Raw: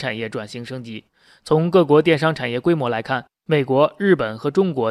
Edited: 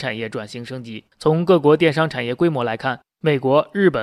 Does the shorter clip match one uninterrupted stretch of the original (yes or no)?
no